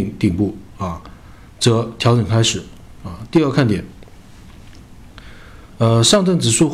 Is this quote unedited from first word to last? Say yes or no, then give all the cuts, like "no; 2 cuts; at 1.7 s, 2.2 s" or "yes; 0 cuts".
no; 1 cut; at 5.7 s